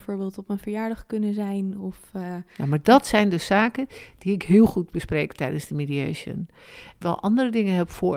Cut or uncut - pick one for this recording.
cut